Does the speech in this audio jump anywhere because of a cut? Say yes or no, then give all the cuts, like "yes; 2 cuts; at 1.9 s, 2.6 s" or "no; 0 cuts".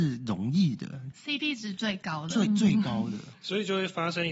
no; 0 cuts